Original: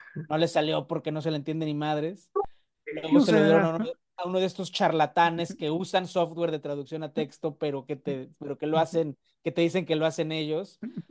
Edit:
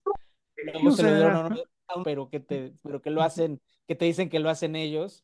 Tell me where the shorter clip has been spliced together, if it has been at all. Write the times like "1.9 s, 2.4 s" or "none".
2.0 s